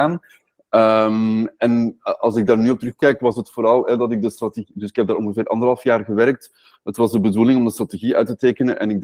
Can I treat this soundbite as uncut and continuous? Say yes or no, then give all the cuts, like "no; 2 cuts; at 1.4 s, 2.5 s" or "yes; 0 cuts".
yes; 0 cuts